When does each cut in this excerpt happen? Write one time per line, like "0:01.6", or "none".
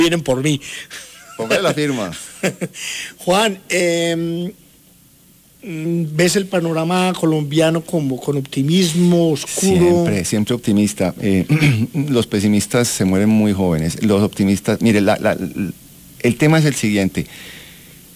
none